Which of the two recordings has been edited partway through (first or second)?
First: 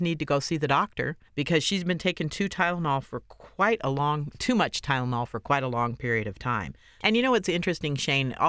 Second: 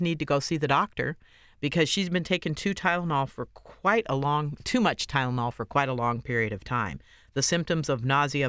first